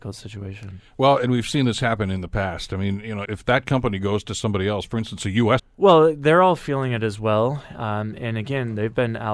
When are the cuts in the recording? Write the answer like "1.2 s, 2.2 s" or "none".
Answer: 3.3 s, 5.6 s

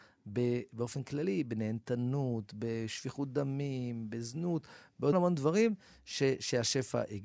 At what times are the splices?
5.1 s

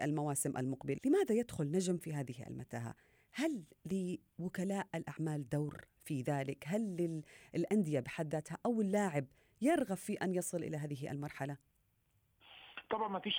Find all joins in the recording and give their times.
1.0 s

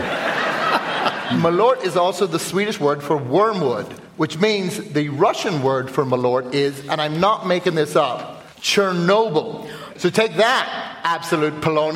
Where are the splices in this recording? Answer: 8.5 s, 9.9 s

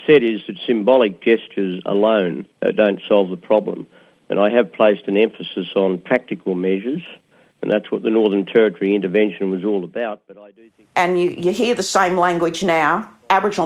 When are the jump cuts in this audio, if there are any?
2.5 s

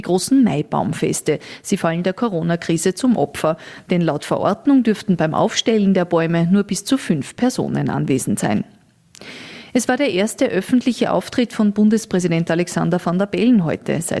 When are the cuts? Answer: none

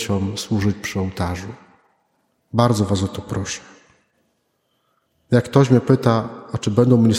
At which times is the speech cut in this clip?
2.4 s

